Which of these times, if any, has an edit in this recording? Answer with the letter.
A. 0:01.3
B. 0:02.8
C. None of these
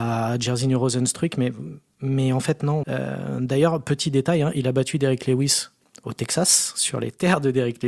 B